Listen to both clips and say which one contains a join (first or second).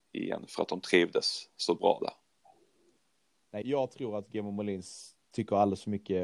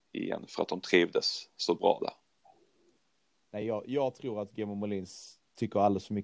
first